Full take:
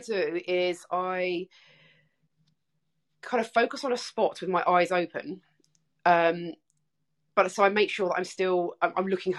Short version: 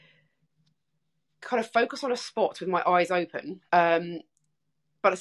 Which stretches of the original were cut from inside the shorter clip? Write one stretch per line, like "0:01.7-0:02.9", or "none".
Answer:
0:05.5-0:06.0

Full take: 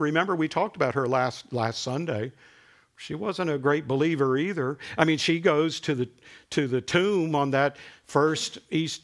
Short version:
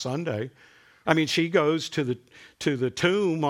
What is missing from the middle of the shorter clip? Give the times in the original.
0:02.9-0:05.0

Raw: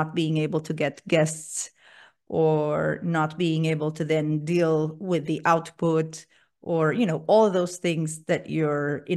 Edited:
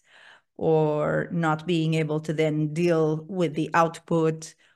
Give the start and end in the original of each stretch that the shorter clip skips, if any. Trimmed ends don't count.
none

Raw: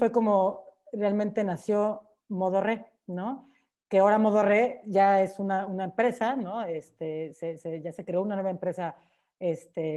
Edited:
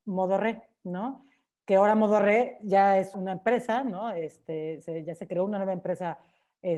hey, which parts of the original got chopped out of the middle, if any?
0:05.4-0:05.7
0:07.3-0:07.6

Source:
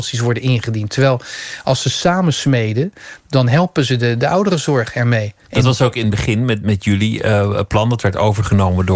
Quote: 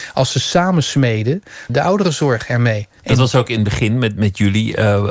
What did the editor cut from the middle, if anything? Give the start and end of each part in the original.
0:03.2-0:04.2

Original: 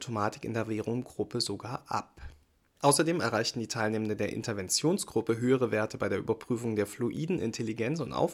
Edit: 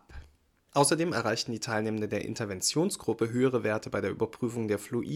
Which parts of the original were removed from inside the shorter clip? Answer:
none

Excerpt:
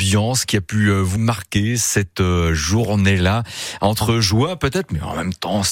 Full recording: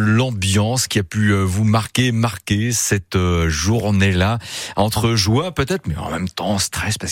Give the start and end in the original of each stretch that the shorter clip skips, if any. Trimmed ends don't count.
0:01.6-0:02.1

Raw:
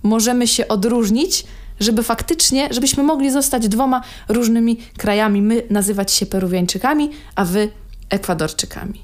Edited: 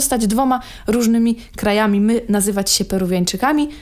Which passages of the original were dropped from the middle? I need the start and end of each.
none

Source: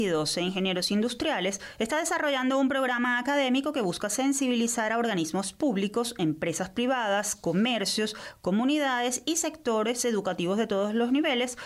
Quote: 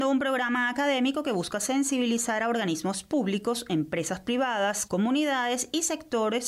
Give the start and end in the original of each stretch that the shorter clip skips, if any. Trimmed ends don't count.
0:07.4-0:08.4

